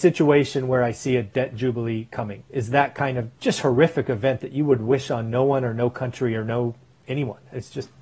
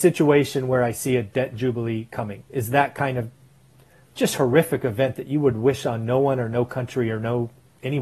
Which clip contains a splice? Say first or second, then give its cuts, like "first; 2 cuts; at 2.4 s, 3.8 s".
first; 1 cut; at 3.4 s